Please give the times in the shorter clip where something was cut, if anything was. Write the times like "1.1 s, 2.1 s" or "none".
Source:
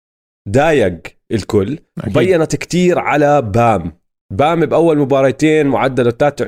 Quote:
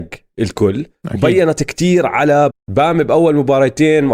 2.5 s